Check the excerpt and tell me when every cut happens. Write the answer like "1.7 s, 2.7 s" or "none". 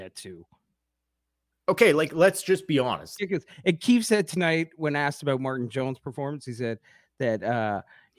3.2 s